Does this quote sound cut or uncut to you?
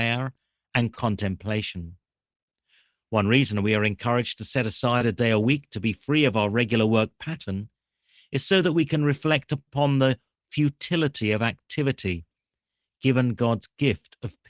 uncut